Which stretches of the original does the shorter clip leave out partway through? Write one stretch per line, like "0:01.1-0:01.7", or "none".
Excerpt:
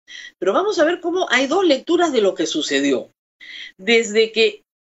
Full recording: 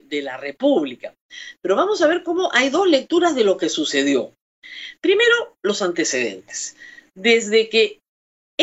0:04.9-0:07.1